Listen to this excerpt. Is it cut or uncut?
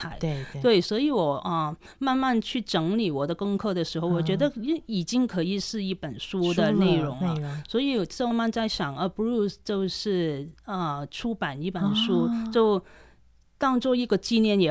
cut